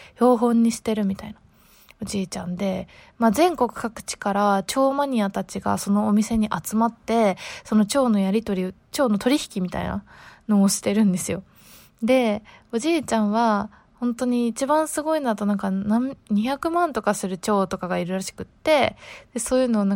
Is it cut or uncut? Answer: uncut